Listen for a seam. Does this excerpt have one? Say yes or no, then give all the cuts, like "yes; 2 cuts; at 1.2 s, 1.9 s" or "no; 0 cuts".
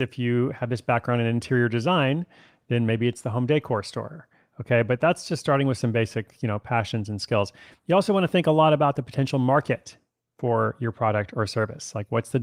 no; 0 cuts